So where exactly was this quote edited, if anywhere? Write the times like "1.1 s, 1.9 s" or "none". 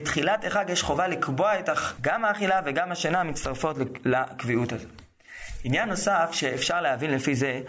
2.0 s